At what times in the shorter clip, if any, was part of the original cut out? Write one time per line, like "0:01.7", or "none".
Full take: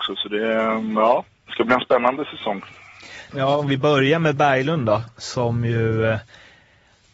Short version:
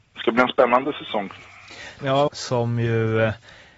0:02.3